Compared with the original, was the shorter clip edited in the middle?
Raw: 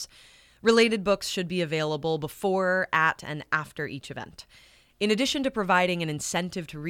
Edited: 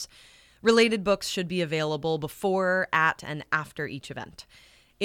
no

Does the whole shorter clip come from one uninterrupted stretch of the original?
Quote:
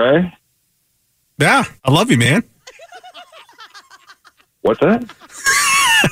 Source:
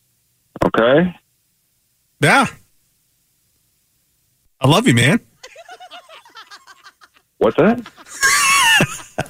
no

